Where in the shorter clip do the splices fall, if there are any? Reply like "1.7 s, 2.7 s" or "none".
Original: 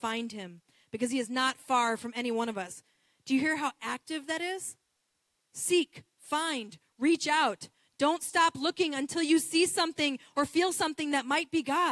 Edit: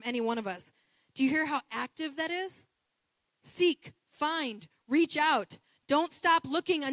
none